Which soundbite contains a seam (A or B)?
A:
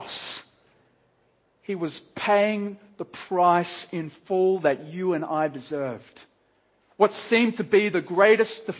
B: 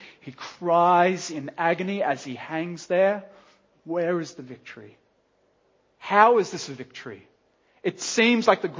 B